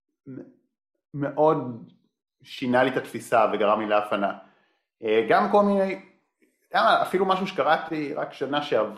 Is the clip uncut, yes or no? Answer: yes